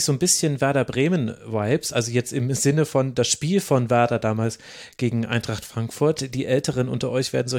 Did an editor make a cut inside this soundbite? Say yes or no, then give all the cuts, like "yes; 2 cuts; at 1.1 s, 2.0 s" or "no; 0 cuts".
no; 0 cuts